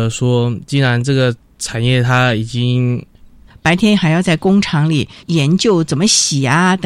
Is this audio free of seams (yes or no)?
no